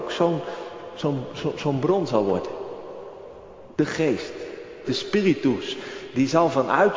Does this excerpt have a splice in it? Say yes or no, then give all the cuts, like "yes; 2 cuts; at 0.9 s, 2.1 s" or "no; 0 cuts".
yes; 2 cuts; at 3.7 s, 4.8 s